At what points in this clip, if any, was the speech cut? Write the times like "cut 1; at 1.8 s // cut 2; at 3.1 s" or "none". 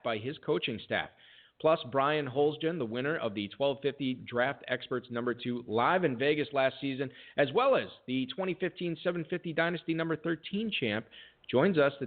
none